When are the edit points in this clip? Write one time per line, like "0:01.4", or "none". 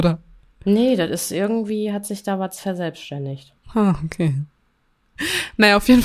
none